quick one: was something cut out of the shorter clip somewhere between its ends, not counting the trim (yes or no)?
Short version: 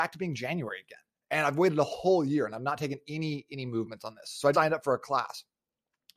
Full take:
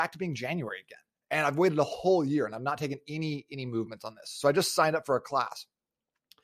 yes